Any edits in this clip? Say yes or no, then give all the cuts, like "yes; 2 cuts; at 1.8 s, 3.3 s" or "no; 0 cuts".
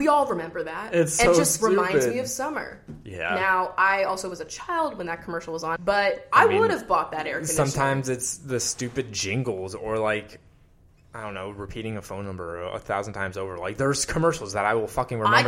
yes; 1 cut; at 5.8 s